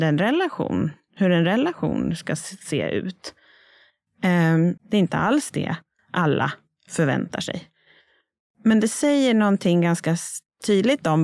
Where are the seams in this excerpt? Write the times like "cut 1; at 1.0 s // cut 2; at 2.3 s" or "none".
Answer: cut 1; at 4.8 s